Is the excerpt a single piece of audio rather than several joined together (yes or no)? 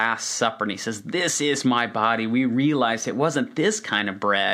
yes